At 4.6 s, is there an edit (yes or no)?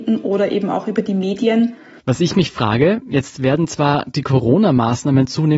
no